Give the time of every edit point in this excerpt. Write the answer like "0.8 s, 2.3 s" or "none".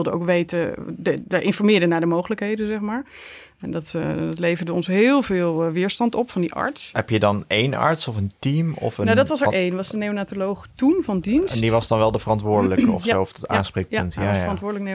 6.9 s